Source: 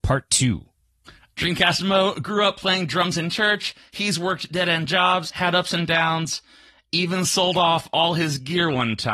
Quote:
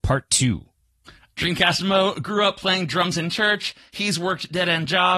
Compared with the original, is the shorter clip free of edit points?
yes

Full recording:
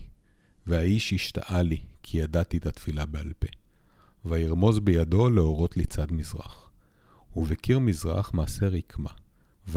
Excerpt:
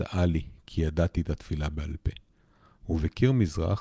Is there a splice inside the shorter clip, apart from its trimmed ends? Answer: yes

